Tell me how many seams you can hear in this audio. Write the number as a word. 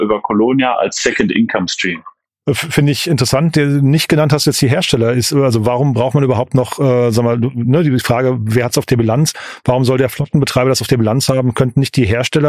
one